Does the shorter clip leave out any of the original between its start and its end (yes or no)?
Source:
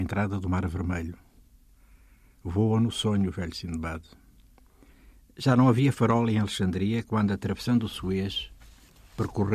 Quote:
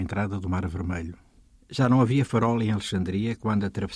yes